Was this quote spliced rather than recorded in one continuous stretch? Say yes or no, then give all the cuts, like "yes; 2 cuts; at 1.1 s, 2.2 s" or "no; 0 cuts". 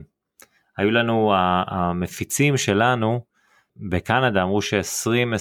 no; 0 cuts